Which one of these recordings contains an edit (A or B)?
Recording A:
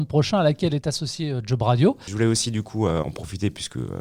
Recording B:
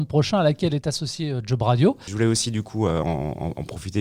A